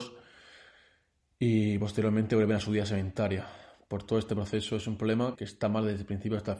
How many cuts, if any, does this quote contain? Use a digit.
1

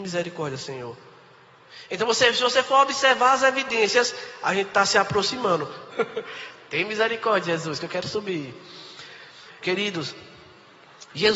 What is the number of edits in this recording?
2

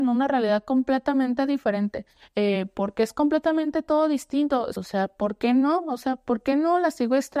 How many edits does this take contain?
1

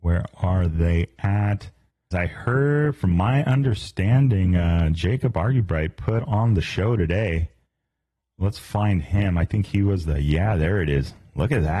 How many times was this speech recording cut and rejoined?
1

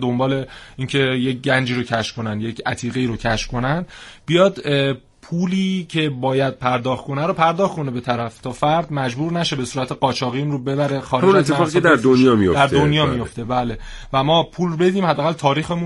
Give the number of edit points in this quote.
0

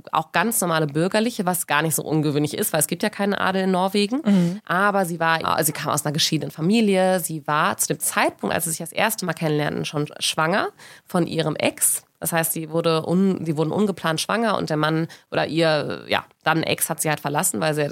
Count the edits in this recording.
1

